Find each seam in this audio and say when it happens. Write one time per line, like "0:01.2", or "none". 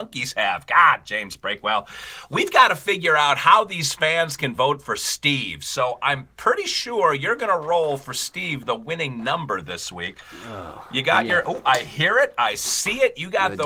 none